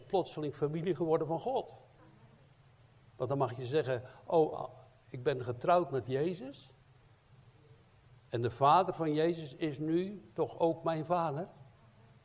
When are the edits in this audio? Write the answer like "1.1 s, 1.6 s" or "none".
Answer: none